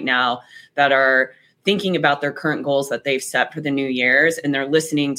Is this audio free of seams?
yes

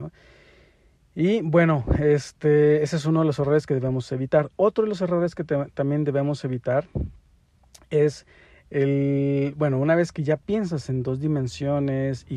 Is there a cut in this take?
no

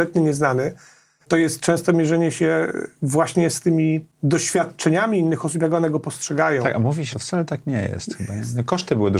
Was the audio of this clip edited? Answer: yes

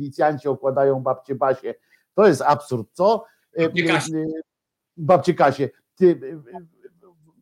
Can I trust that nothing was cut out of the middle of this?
yes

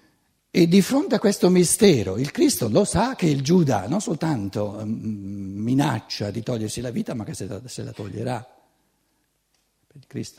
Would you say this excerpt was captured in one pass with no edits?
yes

